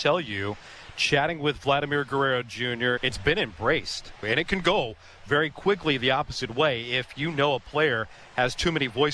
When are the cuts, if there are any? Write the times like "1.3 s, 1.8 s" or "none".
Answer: 3.0 s, 4.2 s